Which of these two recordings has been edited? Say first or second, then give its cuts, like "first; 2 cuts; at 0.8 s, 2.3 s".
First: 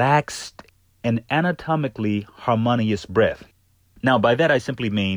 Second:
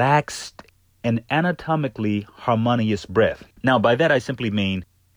second; 1 cut; at 3.5 s